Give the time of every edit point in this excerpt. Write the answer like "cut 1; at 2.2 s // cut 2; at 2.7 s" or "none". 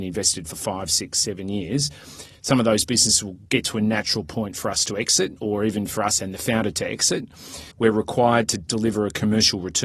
cut 1; at 7.7 s